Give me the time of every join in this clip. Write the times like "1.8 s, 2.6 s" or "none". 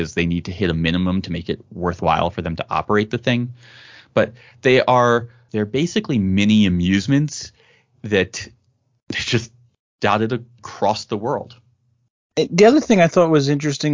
5.5 s